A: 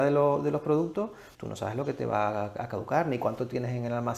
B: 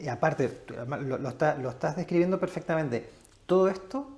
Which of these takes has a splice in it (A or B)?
A